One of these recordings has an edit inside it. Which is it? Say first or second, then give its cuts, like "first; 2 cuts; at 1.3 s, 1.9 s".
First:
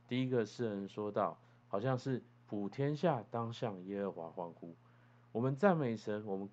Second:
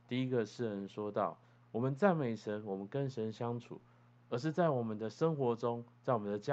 second; 2 cuts; at 1.6 s, 4.1 s